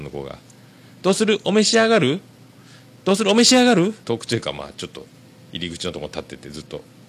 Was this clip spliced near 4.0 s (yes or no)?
yes